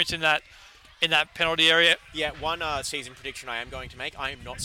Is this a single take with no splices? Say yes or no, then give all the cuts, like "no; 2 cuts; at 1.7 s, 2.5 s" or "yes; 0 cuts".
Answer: no; 1 cut; at 2.1 s